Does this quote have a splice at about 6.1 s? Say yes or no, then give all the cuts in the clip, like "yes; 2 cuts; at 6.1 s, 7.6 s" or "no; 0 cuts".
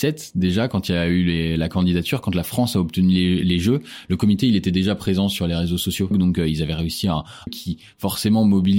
yes; 2 cuts; at 6.1 s, 7.5 s